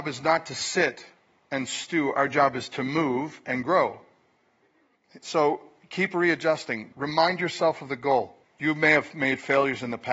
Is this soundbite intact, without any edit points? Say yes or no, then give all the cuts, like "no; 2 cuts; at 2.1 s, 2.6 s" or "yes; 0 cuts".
no; 2 cuts; at 6.9 s, 8.4 s